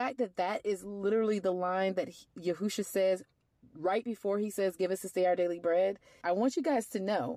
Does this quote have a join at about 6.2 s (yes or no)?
yes